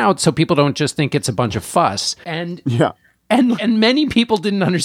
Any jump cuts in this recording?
yes; 2 cuts; at 2.2 s, 3.6 s

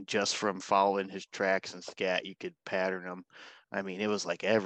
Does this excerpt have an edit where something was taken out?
no; 0 cuts

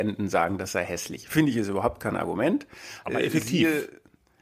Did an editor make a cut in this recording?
yes; 1 cut; at 3.0 s

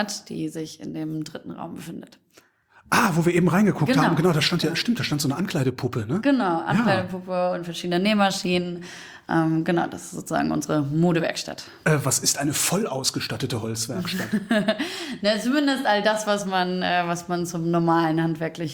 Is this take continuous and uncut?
yes; 0 cuts

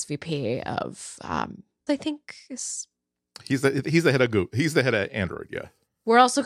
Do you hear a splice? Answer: yes; 1 cut; at 1.9 s

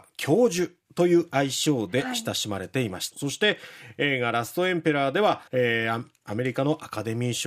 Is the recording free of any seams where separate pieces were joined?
no; 2 cuts; at 3.1 s, 5.5 s

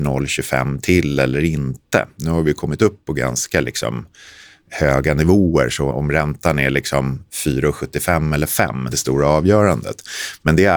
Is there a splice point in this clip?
yes; 2 cuts; at 5.9 s, 8.9 s

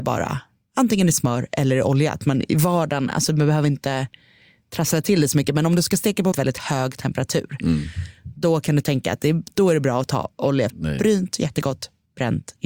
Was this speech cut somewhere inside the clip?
yes; 2 cuts; at 6.3 s, 10.7 s

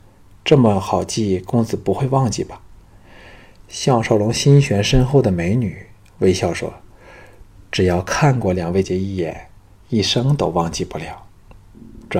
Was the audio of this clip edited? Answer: yes; 1 cut; at 8.8 s

